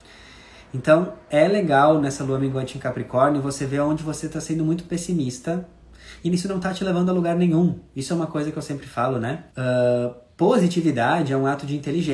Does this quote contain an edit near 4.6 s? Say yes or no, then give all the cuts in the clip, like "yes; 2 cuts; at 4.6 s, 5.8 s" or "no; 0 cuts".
no; 1 cut; at 9.5 s